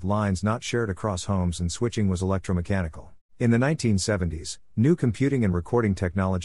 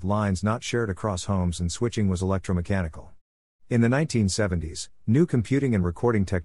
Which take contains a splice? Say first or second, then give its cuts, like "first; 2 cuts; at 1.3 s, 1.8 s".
first; 1 cut; at 3.3 s